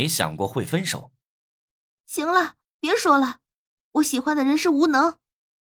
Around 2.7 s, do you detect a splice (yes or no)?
no